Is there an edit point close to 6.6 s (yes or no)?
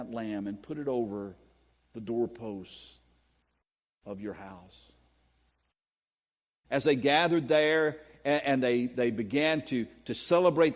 yes